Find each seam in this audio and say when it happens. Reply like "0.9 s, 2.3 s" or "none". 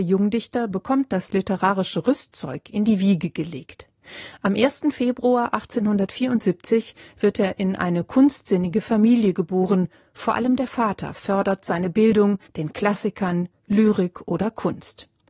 12.5 s